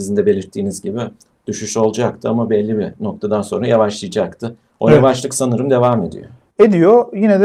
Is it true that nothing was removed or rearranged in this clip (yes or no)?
yes